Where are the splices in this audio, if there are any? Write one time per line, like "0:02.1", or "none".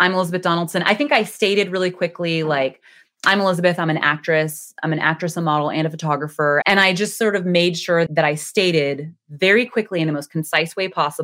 0:06.6
0:08.1